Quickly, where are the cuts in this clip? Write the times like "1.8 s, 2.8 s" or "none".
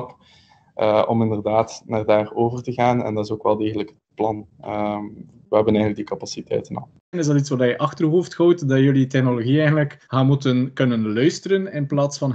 7.1 s, 10.0 s